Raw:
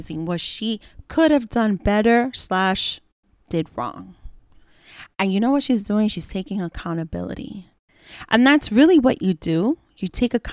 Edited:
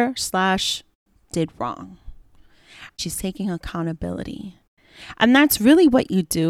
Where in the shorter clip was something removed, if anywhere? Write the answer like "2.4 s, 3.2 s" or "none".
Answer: 3.0 s